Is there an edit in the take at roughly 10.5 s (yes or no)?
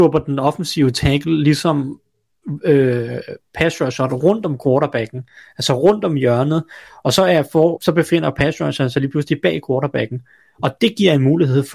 no